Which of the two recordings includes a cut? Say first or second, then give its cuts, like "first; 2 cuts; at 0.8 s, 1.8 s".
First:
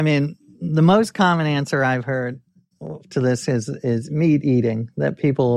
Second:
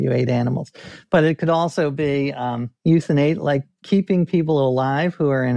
second; 1 cut; at 2.8 s